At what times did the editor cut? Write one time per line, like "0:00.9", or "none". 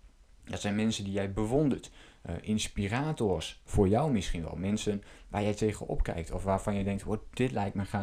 none